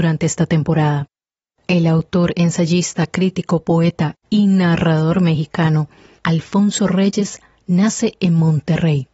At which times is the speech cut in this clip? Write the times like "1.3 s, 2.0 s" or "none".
none